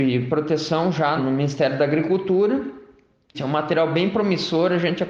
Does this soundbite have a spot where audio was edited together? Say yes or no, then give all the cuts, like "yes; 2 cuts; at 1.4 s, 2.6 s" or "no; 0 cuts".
yes; 2 cuts; at 1.2 s, 3.3 s